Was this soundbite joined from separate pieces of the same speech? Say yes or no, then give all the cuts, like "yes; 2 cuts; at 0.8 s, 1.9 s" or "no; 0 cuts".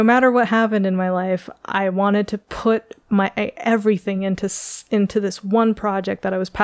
no; 0 cuts